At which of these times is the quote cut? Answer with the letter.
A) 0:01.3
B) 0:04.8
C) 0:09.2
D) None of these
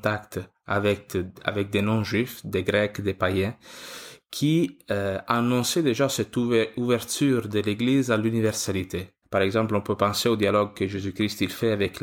C